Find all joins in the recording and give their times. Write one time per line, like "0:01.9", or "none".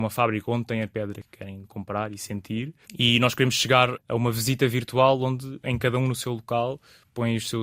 0:02.8